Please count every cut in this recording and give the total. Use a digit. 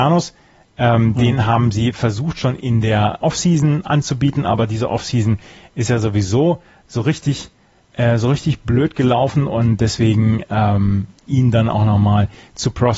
2